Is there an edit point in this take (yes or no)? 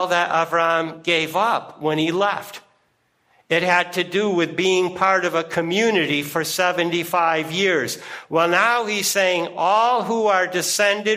no